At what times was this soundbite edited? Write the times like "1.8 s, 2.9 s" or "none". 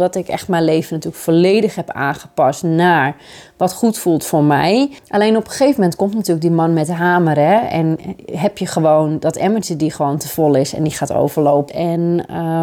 5.0 s, 11.7 s